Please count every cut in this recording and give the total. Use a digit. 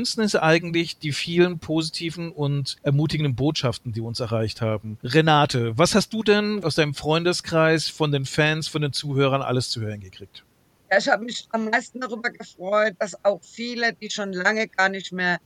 0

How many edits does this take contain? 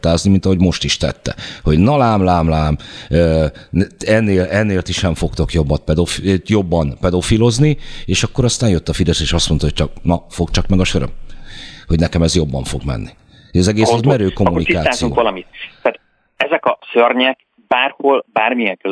0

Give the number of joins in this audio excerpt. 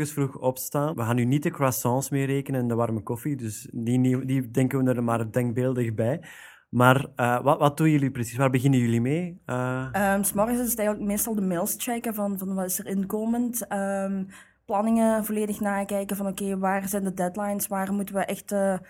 1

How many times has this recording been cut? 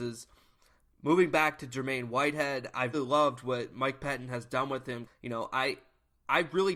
2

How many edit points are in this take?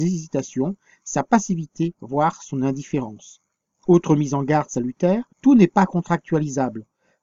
1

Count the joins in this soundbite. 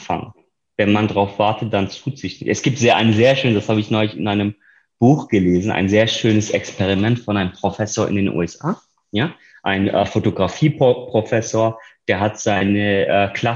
0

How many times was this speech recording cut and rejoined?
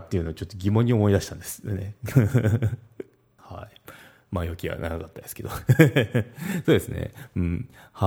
1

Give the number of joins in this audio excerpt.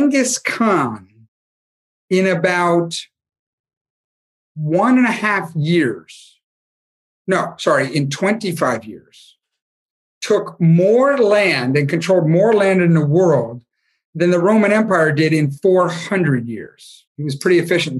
1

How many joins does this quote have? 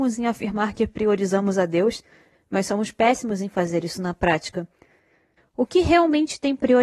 1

